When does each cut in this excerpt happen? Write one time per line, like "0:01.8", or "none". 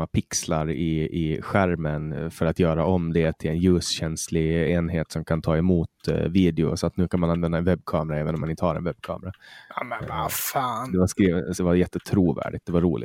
0:11.6